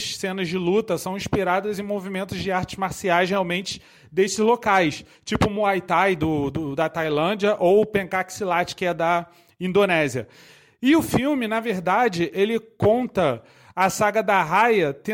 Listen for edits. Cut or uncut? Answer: uncut